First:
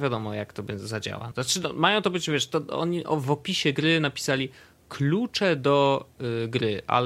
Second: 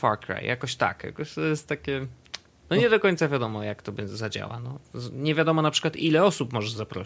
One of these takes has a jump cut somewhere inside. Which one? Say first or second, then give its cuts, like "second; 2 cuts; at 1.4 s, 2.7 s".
first; 1 cut; at 1.3 s